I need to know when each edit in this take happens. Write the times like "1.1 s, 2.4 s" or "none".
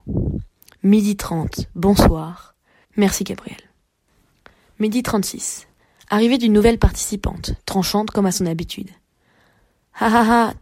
2.8 s